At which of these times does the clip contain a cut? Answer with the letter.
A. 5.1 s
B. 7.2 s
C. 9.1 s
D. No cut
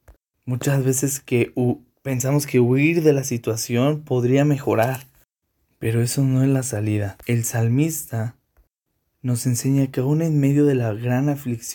B